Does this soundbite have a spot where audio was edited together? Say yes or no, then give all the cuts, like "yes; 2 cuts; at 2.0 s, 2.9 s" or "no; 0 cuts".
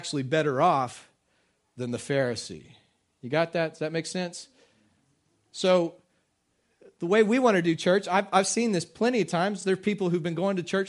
no; 0 cuts